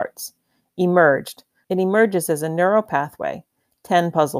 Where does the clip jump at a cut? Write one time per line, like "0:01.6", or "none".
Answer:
0:01.6